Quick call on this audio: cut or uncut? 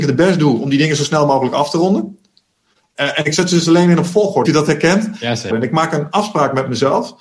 cut